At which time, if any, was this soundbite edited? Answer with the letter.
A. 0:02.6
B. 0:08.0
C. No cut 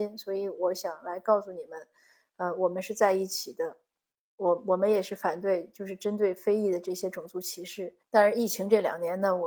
B